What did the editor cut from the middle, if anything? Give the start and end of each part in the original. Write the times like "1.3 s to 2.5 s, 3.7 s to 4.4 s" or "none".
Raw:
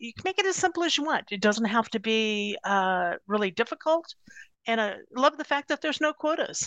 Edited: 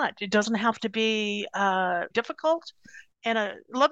3.2 s to 3.5 s